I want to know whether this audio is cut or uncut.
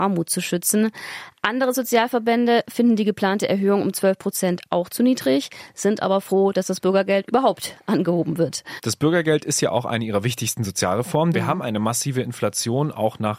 cut